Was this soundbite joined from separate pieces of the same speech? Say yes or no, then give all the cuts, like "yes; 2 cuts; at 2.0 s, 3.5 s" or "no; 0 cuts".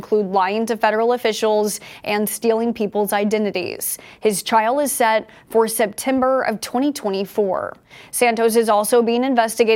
no; 0 cuts